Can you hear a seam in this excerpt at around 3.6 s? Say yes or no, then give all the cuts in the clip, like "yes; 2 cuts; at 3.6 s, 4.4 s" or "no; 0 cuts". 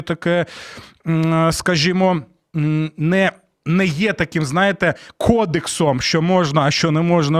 yes; 1 cut; at 3.6 s